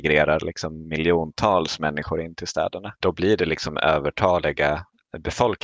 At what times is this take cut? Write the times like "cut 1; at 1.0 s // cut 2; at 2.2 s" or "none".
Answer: cut 1; at 3.0 s